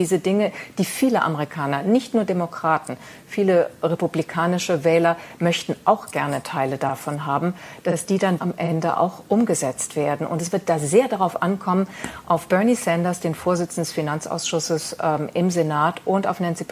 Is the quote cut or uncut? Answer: cut